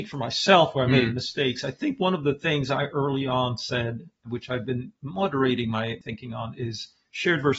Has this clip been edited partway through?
no; 0 cuts

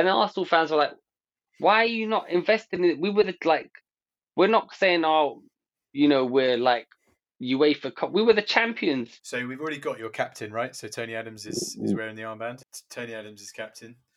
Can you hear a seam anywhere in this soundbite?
yes; 2 cuts; at 9.2 s, 12.6 s

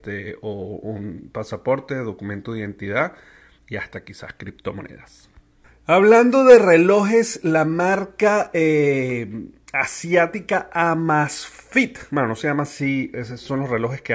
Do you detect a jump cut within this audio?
no; 0 cuts

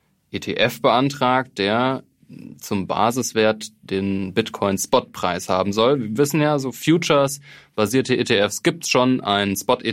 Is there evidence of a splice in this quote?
no; 0 cuts

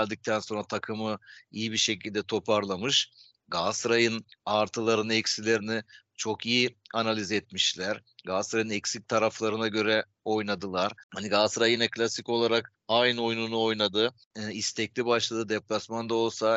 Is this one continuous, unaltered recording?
yes; 0 cuts

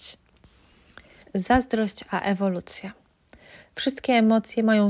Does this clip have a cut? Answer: yes; 1 cut; at 1.2 s

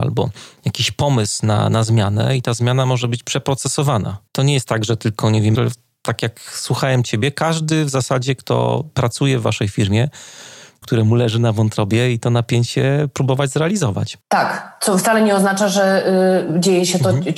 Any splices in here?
yes; 3 cuts; at 4.3 s, 5.5 s, 10.8 s

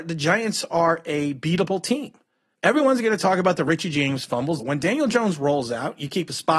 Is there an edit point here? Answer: yes; 2 cuts; at 2.5 s, 4.6 s

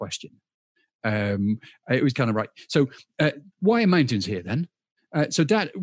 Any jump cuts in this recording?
yes; 2 cuts; at 2.1 s, 3.5 s

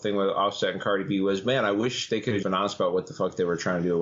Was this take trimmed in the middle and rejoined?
yes; 1 cut; at 2.4 s

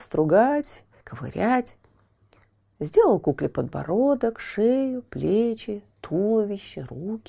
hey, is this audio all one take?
no; 1 cut; at 1.0 s

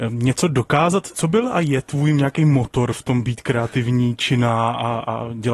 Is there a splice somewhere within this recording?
no; 0 cuts

